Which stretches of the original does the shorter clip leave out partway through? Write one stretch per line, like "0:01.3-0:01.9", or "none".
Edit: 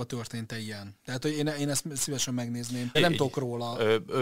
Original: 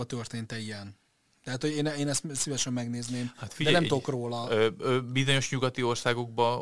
0:01.0-0:01.4
0:03.3-0:03.7